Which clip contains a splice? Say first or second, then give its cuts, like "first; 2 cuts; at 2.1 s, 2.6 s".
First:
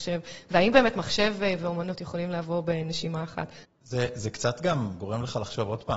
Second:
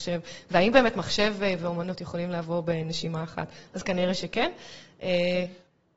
first; 1 cut; at 3.6 s